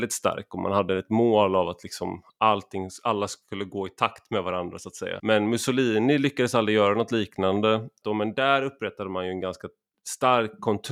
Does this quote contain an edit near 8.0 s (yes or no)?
yes